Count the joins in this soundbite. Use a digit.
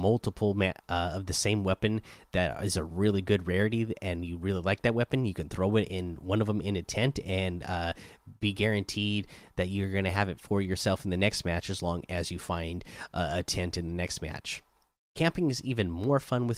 0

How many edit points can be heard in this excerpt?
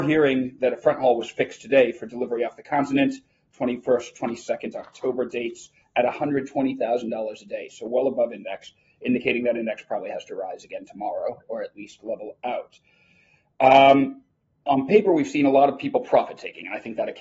1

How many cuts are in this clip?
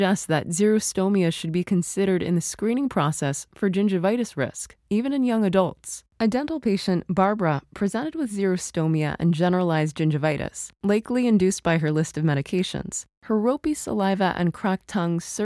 0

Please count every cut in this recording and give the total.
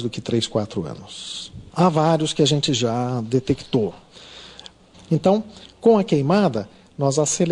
2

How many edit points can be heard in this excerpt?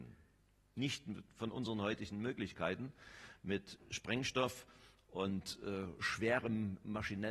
0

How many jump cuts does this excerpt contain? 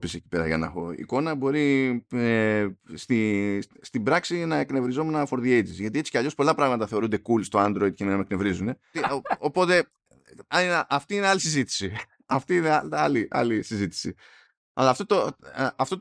1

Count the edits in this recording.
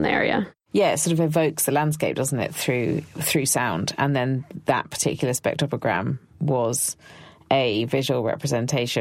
0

